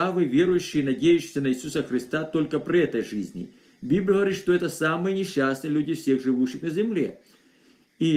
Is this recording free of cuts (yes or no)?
yes